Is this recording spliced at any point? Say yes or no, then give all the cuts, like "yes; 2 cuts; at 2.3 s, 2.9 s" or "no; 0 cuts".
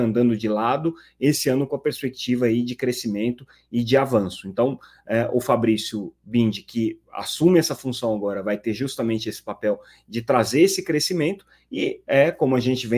no; 0 cuts